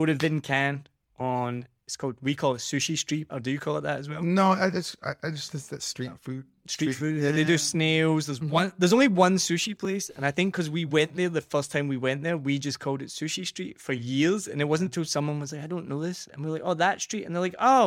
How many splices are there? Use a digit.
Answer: 1